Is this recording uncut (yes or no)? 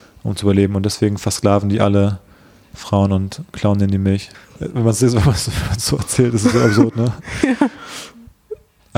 yes